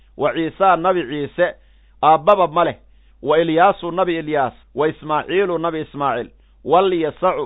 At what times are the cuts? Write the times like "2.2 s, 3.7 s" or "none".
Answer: 4.6 s

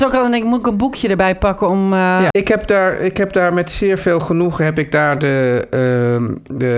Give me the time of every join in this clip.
2.3 s

